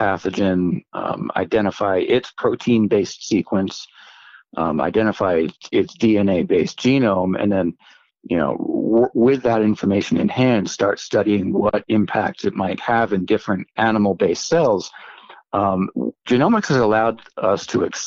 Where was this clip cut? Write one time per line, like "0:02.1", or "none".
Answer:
0:13.8